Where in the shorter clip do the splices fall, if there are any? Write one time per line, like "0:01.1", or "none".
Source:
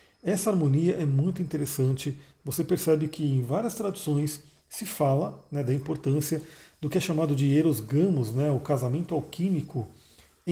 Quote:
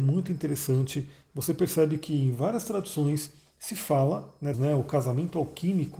0:04.5